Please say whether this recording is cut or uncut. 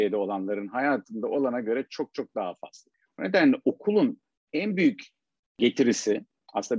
uncut